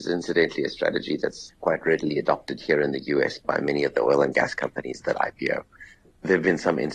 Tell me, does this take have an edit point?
no; 0 cuts

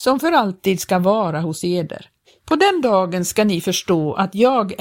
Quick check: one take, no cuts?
no; 1 cut; at 2.4 s

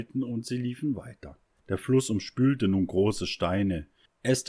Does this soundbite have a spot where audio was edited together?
yes; 1 cut; at 1.6 s

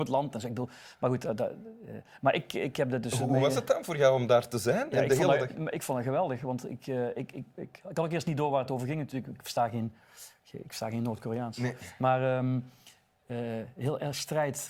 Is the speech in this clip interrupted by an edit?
yes; 1 cut; at 7.5 s

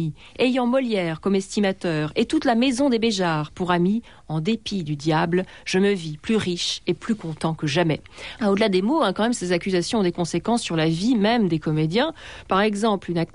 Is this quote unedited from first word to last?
no; 1 cut; at 8.4 s

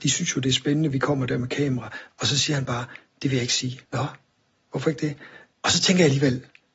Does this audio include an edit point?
yes; 2 cuts; at 3.9 s, 5.5 s

